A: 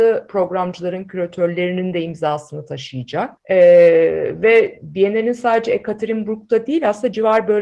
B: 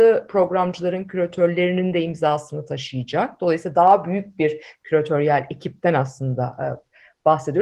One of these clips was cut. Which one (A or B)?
A